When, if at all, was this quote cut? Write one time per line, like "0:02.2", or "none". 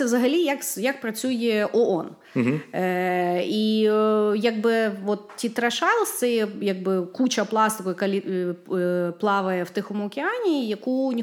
none